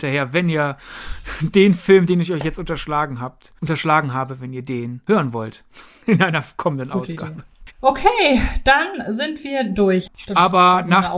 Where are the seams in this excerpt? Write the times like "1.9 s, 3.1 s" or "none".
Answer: 7.7 s, 10.1 s